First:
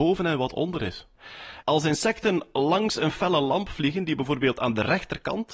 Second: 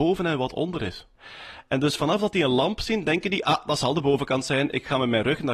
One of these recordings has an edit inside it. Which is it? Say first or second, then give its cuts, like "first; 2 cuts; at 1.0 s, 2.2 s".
first; 1 cut; at 1.6 s